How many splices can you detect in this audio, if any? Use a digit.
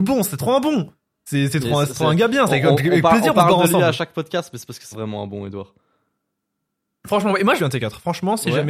2